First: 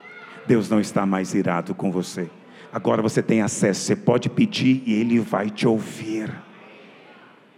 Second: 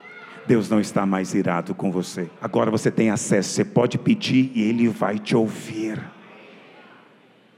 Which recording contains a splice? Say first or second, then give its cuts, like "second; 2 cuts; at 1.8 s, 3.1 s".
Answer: second; 1 cut; at 2.4 s